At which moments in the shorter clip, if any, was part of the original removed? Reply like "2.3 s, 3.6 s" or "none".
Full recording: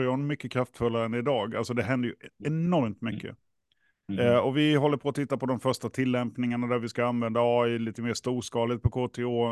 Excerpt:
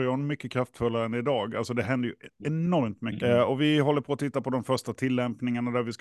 3.2 s

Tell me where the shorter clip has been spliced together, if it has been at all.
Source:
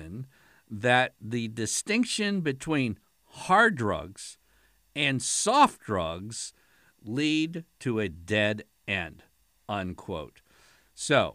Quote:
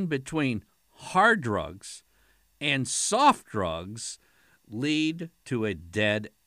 none

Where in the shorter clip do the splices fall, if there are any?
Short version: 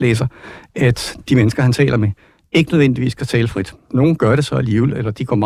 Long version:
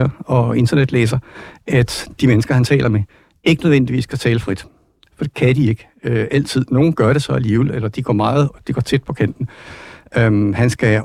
3.9 s

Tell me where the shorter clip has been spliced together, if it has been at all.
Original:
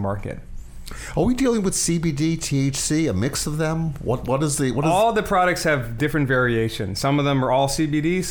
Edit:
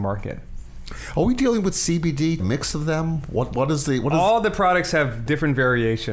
2.4 s

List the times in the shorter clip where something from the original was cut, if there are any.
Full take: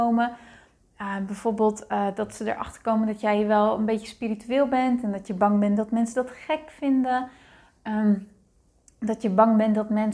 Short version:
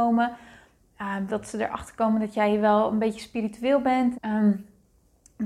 1.3 s, 4.1 s

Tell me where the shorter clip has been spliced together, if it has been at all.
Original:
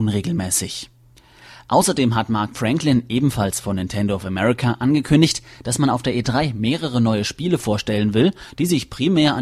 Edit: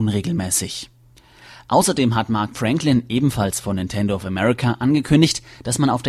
none

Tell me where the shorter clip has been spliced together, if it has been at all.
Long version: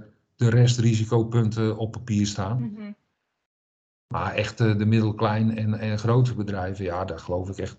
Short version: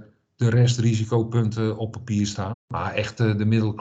2.5 s

